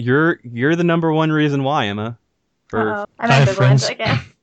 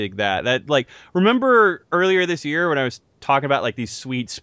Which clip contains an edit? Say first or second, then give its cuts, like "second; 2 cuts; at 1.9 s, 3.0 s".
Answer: first; 1 cut; at 3.0 s